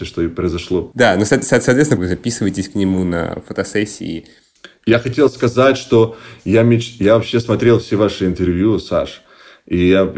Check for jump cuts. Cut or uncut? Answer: cut